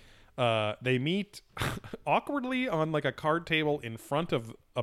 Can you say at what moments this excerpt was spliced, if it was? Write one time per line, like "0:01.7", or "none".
none